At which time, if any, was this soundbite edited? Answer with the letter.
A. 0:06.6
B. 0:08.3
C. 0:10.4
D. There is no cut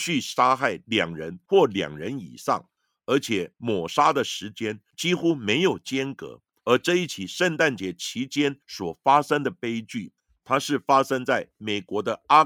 A